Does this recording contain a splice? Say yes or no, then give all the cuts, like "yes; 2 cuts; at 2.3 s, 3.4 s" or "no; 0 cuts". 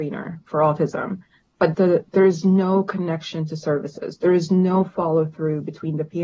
yes; 1 cut; at 1.7 s